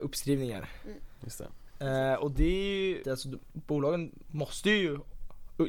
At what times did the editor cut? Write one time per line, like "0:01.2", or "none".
0:03.0